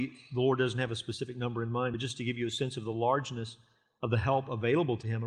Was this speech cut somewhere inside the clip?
no; 0 cuts

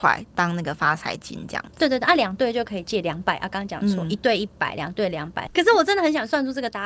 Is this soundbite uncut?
no; 1 cut; at 5.6 s

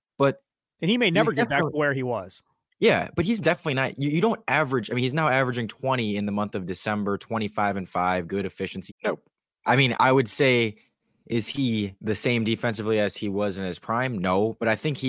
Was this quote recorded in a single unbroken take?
no; 3 cuts; at 8.9 s, 9.9 s, 12.0 s

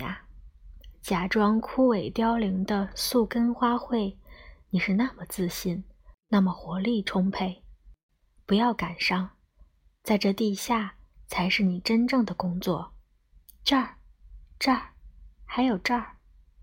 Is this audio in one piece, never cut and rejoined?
yes; 0 cuts

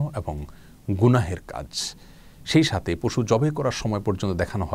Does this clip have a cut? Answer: no; 0 cuts

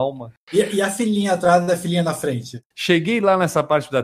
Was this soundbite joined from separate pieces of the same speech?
yes; 1 cut; at 2.7 s

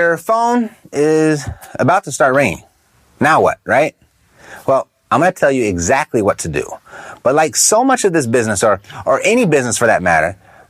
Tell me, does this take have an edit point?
no; 0 cuts

